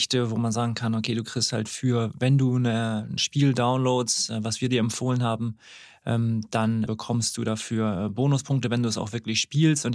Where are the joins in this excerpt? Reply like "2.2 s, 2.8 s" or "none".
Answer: 6.9 s